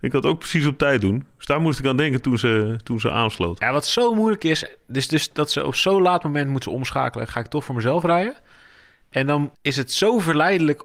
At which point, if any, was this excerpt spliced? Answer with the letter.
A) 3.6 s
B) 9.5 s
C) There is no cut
B